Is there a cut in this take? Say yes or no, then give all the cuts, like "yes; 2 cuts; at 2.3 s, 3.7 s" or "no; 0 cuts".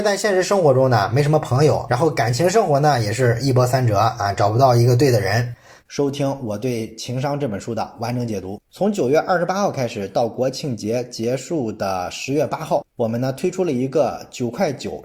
yes; 2 cuts; at 5.8 s, 8.6 s